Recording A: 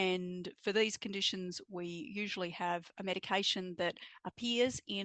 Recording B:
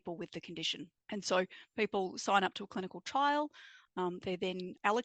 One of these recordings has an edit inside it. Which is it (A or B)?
B